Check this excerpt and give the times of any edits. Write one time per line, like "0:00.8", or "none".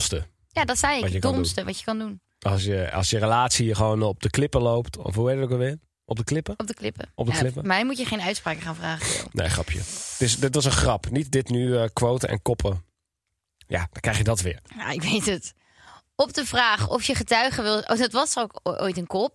0:09.0